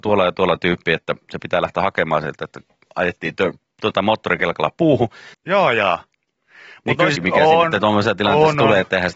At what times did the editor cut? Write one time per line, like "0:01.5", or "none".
0:05.3
0:07.1